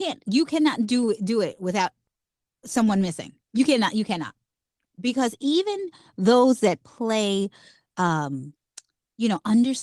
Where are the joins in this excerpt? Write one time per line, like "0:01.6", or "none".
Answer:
none